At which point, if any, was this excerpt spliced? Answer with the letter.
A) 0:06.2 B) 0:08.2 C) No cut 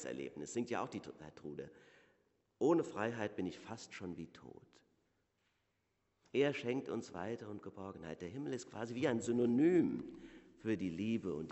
A